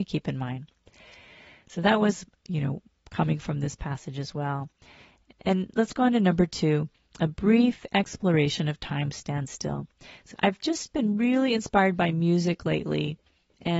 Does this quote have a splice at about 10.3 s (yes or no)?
yes